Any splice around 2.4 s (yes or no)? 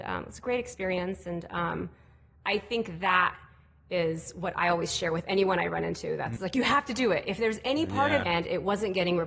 no